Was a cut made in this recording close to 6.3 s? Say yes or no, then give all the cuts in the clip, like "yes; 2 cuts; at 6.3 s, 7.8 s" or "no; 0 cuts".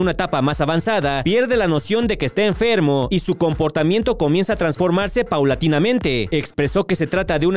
yes; 1 cut; at 6.3 s